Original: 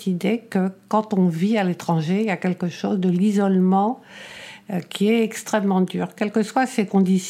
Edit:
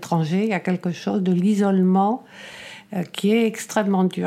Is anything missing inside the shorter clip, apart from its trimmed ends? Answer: no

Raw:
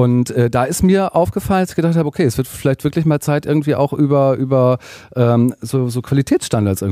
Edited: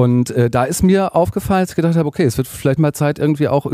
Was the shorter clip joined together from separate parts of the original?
yes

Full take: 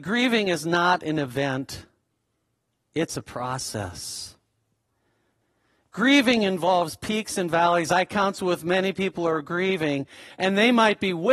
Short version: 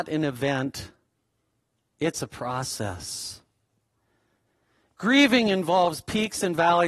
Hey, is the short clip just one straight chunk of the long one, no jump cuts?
yes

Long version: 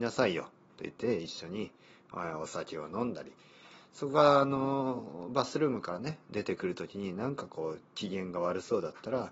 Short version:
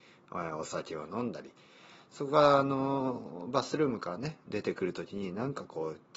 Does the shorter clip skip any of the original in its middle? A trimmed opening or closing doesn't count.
no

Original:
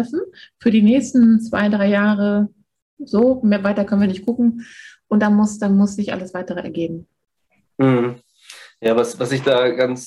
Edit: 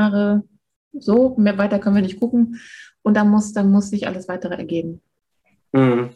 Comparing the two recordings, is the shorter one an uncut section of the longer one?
yes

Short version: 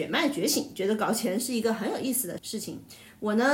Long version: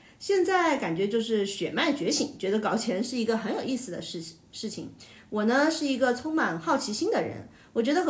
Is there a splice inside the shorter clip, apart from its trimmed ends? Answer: yes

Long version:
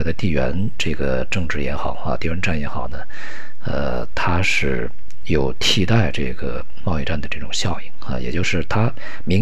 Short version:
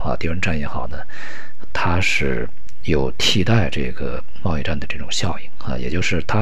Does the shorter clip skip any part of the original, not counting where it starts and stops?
yes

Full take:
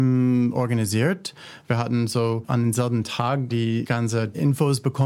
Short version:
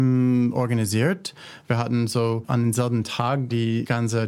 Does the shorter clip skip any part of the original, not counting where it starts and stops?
no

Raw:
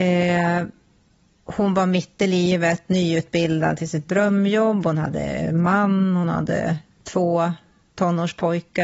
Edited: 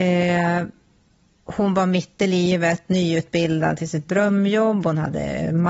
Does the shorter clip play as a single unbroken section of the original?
yes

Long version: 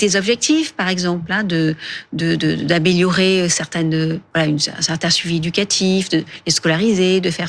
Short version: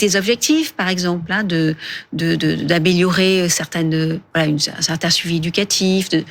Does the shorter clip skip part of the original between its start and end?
no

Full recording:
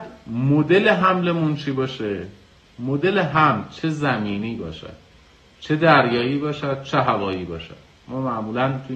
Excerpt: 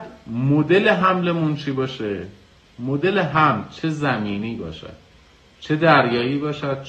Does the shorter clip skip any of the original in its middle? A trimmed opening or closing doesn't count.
no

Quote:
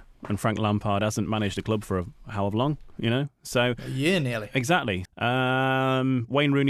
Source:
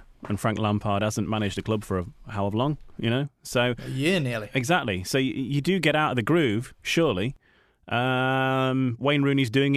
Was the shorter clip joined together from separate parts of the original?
yes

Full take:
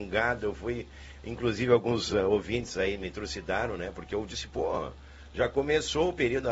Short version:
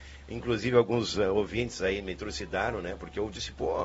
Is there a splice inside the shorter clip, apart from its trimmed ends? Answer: no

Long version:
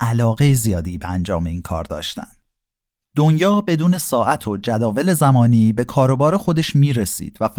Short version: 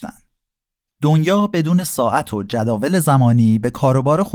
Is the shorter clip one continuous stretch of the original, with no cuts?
yes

